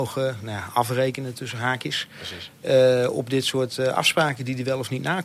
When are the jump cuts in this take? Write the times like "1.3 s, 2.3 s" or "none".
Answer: none